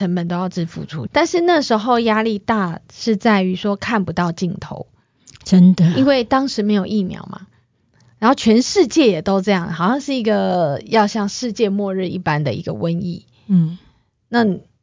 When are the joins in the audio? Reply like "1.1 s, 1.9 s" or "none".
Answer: 1.1 s